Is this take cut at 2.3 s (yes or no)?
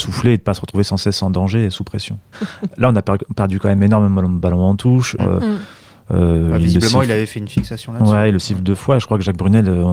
yes